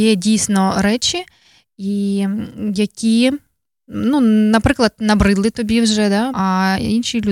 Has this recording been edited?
yes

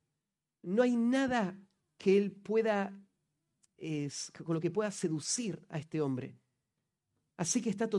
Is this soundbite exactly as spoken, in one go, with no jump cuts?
yes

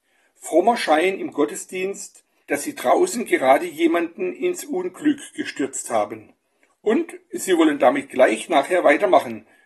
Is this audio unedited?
no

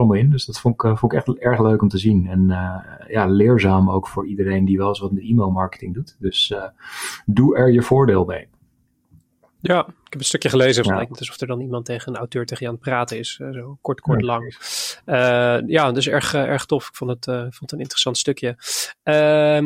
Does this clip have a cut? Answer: yes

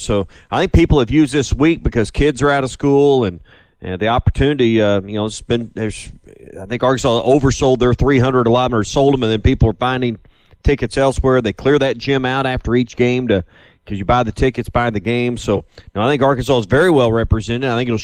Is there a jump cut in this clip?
no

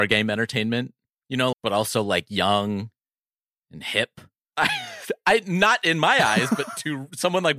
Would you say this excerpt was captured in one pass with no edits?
no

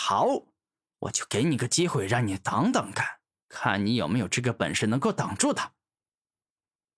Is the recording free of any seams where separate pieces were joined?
yes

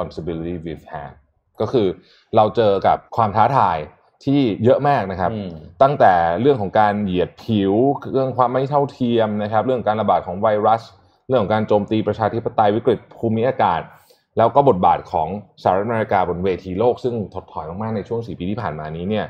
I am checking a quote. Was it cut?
yes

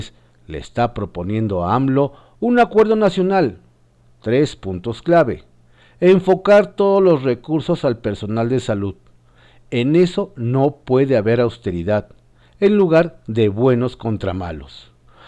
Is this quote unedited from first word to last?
yes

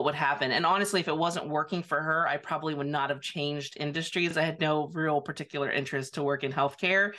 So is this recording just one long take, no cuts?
yes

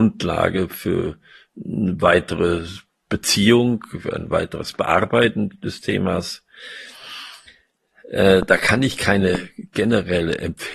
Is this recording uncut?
yes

